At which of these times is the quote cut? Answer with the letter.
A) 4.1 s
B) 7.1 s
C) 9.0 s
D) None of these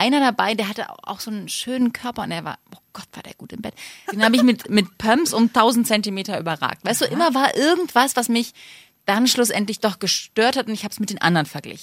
A